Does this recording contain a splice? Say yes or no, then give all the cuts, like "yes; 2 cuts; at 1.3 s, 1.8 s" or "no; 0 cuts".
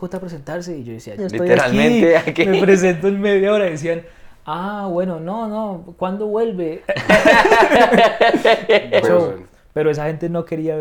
yes; 2 cuts; at 1.2 s, 9.0 s